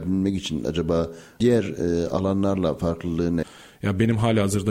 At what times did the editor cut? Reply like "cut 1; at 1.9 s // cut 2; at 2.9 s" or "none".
cut 1; at 3.4 s